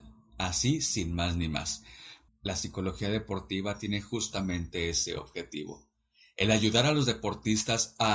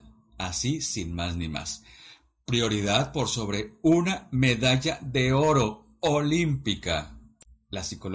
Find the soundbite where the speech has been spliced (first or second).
first